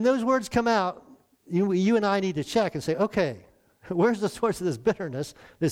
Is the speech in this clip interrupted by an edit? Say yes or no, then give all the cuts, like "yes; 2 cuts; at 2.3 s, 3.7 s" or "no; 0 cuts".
no; 0 cuts